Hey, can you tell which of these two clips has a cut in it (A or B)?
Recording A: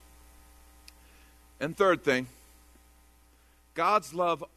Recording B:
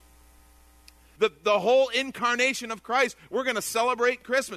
B